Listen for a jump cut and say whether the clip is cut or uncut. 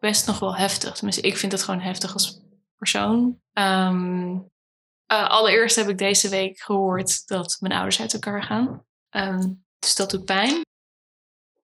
cut